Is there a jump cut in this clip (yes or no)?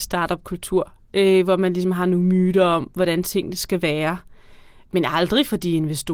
no